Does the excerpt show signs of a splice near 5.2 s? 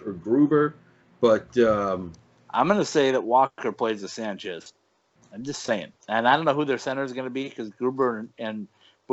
yes; 1 cut; at 5.2 s

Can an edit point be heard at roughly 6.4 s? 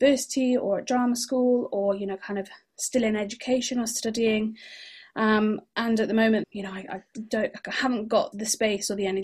yes; 2 cuts; at 6.4 s, 8.3 s

